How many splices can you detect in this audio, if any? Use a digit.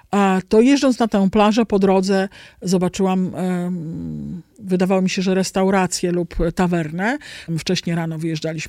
2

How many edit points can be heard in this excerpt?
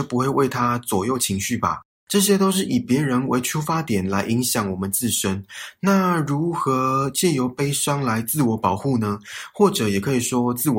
0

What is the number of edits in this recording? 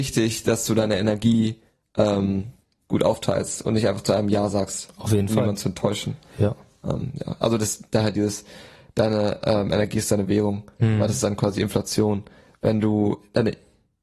0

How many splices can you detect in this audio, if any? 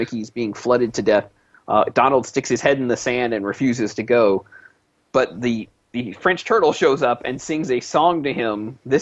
0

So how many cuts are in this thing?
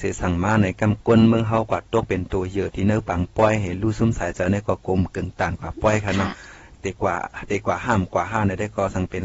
1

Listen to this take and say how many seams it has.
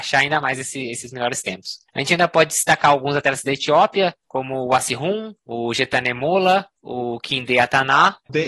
0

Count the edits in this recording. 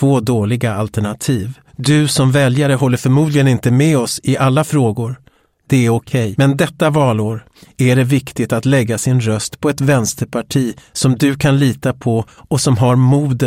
2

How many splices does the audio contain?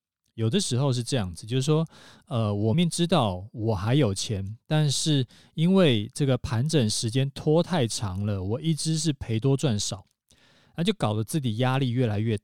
1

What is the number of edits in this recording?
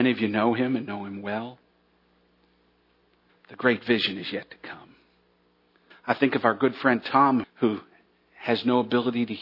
3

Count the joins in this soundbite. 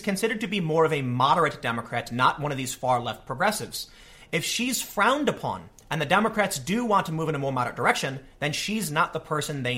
0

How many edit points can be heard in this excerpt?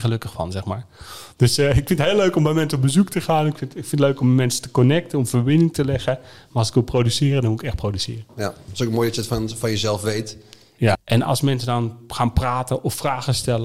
1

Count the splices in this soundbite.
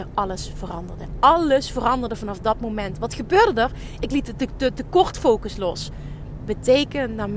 2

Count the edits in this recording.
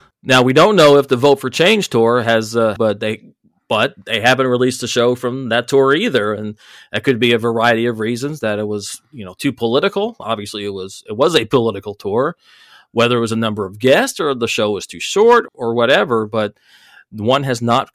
2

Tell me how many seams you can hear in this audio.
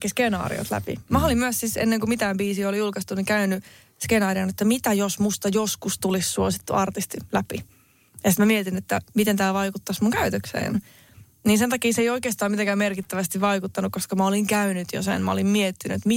0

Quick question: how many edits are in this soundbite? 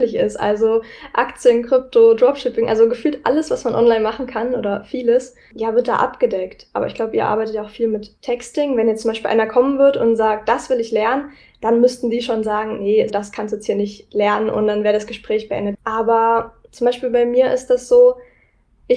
2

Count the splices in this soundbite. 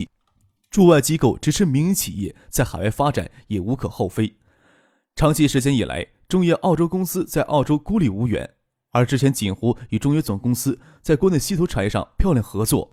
0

